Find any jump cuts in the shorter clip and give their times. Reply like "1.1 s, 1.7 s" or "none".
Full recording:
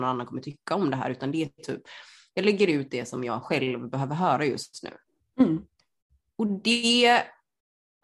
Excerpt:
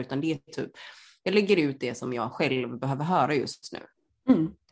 none